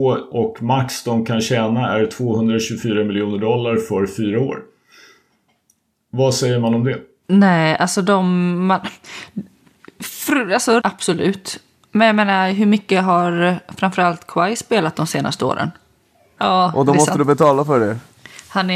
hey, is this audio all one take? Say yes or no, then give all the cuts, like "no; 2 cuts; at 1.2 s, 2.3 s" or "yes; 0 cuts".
no; 3 cuts; at 7.2 s, 10.8 s, 16.4 s